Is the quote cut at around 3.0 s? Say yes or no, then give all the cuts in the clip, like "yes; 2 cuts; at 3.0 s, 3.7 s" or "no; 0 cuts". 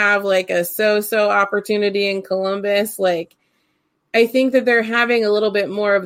no; 0 cuts